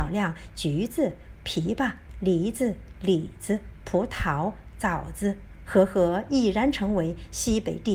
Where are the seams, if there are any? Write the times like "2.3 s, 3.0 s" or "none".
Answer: 1.3 s, 5.6 s